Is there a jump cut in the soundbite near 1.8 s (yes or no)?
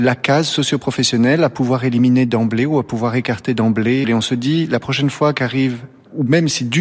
no